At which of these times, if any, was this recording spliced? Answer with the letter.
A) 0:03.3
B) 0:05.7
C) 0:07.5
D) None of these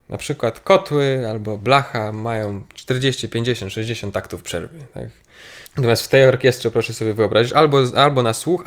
B